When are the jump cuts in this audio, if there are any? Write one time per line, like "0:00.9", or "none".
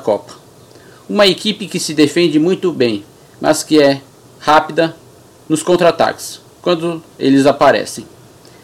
0:04.3
0:07.1